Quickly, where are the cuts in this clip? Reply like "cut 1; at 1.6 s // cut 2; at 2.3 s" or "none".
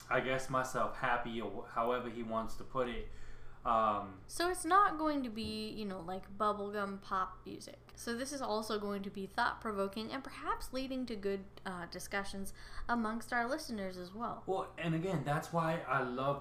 cut 1; at 7.9 s // cut 2; at 14.8 s